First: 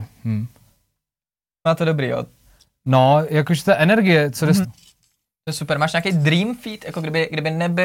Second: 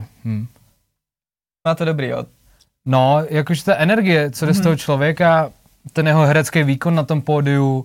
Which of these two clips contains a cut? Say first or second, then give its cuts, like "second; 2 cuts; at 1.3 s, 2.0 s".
first; 1 cut; at 4.6 s